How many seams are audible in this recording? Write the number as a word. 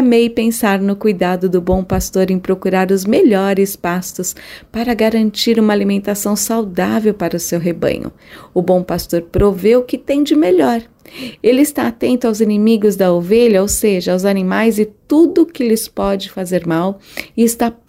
one